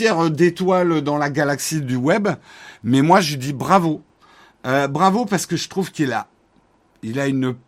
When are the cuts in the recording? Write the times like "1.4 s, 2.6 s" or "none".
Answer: none